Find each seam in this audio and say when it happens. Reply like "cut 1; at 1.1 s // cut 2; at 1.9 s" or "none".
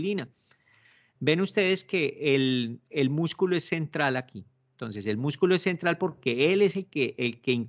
cut 1; at 1.2 s